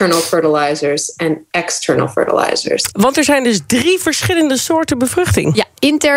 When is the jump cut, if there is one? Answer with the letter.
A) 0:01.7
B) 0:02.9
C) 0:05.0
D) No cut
B